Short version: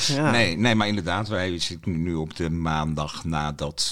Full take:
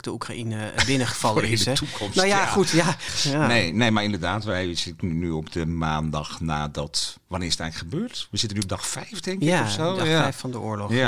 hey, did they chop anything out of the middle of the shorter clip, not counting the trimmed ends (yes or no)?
no